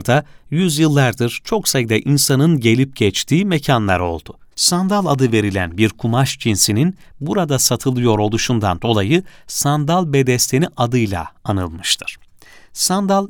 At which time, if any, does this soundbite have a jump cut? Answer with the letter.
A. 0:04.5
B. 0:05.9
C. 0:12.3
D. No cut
A